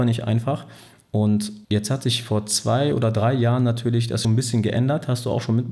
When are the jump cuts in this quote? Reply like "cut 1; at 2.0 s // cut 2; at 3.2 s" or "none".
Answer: cut 1; at 1.6 s // cut 2; at 4.2 s